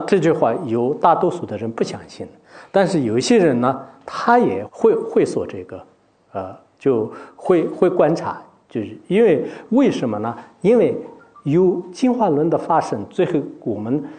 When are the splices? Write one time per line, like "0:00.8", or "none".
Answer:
0:04.7